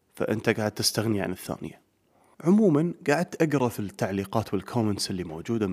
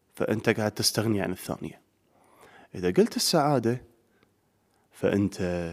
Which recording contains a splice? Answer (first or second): first